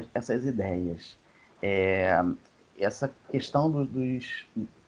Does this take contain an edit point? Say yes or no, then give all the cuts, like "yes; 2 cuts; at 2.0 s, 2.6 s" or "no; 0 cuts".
no; 0 cuts